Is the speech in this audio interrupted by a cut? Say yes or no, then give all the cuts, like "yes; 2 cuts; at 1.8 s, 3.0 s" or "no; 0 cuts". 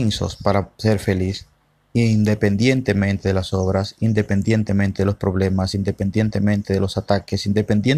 no; 0 cuts